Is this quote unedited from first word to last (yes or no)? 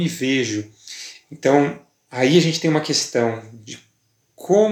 no